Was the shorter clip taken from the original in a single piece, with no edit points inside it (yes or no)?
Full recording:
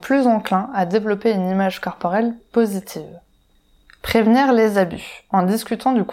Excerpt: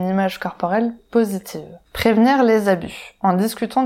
no